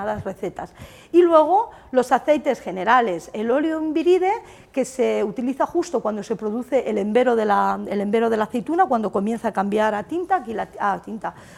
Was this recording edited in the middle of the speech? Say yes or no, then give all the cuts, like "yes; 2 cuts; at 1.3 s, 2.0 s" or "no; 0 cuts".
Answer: no; 0 cuts